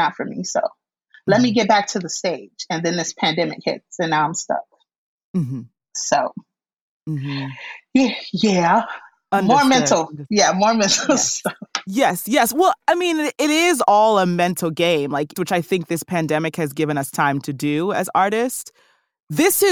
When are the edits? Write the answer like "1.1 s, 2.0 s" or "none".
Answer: 15.3 s